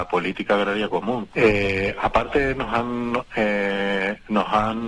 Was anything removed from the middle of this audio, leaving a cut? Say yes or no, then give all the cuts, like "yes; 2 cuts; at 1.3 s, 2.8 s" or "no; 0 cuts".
yes; 1 cut; at 1.3 s